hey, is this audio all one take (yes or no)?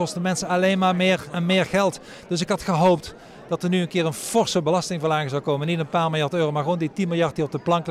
yes